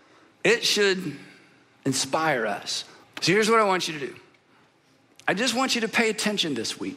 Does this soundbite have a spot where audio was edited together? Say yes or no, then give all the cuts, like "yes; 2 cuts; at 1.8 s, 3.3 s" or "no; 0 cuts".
yes; 1 cut; at 3.0 s